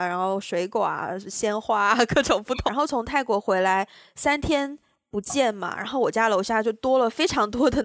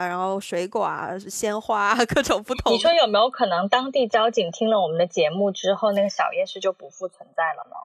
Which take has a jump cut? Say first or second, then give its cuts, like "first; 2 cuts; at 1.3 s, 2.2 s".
first; 1 cut; at 2.7 s